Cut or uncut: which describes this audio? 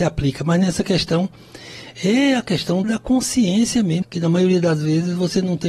cut